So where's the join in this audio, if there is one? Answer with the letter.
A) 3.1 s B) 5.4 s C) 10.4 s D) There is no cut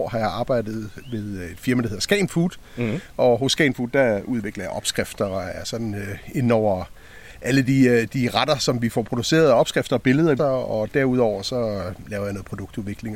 C